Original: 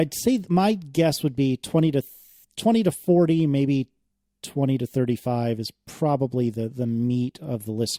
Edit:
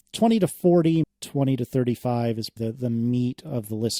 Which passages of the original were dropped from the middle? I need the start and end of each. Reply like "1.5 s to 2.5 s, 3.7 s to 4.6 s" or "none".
3.5 s to 4.2 s, 5.8 s to 6.5 s